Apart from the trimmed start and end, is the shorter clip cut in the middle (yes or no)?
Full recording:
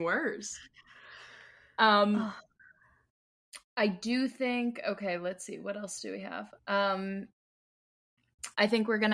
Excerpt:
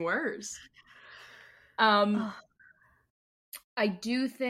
no